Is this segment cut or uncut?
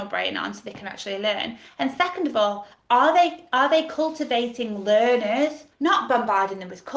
cut